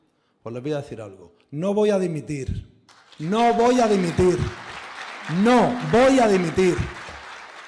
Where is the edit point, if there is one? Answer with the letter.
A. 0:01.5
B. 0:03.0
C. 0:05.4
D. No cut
D